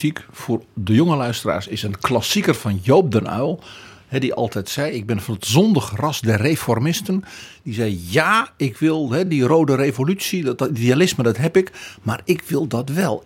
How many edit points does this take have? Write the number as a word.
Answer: zero